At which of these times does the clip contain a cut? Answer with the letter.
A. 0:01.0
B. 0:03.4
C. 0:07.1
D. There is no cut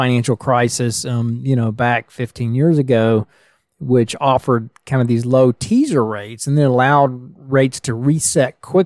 D